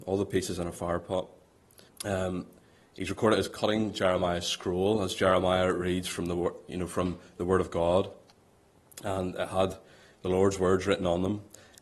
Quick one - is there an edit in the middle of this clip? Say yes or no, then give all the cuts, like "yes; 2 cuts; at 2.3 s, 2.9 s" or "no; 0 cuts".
yes; 1 cut; at 1.9 s